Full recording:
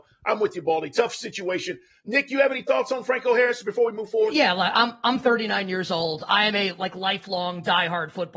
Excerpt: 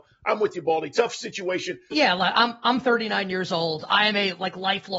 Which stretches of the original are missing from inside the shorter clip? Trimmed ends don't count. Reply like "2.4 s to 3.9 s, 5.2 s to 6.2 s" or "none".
1.9 s to 4.3 s